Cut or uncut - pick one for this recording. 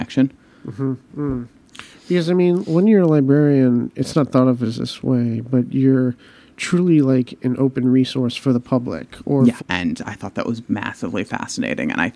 cut